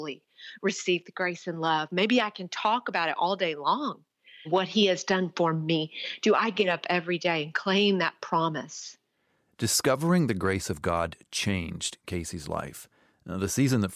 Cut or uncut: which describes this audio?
cut